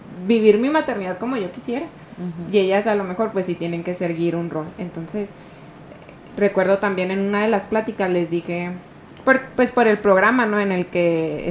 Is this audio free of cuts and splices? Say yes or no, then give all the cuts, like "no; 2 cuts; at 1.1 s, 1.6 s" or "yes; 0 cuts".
yes; 0 cuts